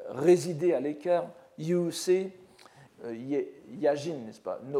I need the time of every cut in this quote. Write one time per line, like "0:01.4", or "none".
0:02.9